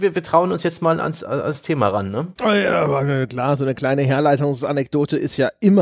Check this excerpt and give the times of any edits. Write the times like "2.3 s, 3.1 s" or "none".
2.4 s